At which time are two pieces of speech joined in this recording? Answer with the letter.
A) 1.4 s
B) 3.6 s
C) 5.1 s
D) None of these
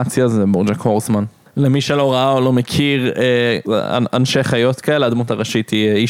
B